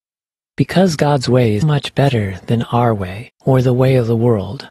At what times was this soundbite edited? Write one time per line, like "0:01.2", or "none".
0:01.6
0:03.3